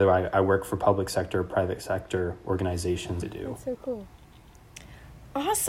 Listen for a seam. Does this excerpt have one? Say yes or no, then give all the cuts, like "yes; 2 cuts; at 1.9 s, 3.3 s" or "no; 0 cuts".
yes; 1 cut; at 3.2 s